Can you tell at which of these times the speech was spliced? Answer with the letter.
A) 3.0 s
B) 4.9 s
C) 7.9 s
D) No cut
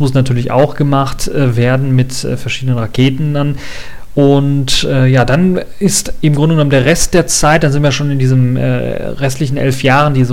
D